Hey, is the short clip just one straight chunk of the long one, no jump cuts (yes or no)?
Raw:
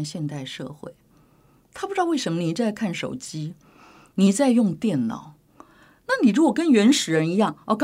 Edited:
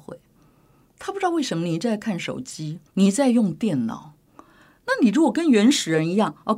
no